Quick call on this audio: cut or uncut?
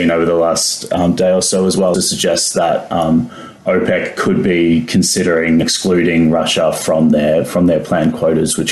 cut